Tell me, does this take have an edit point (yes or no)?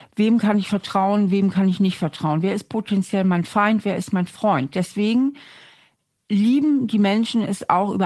no